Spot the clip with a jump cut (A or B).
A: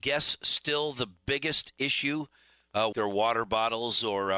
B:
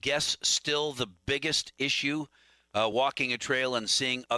A